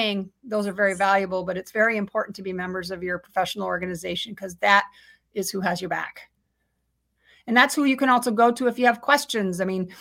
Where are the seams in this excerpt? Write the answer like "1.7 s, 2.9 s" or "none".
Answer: none

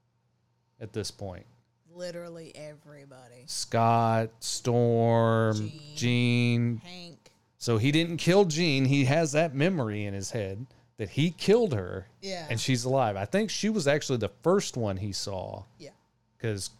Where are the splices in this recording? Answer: 15.7 s

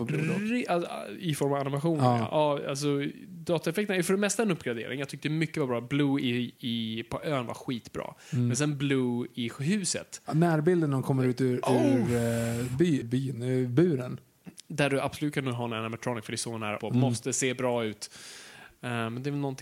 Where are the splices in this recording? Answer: 13.0 s, 16.8 s

